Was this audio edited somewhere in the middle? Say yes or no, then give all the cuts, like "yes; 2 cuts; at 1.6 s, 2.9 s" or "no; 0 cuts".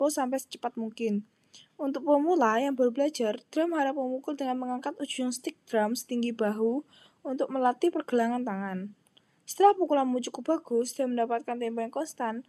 no; 0 cuts